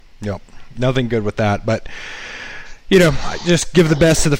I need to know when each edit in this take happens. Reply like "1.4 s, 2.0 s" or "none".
none